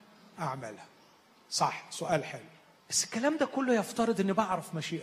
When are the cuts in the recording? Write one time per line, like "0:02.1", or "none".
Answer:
0:02.8